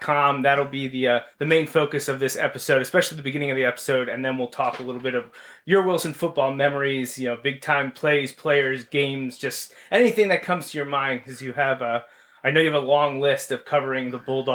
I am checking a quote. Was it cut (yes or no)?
no